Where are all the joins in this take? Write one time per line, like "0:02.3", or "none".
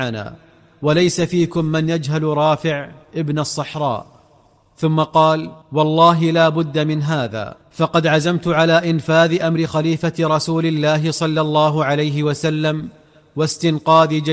0:05.6
0:07.6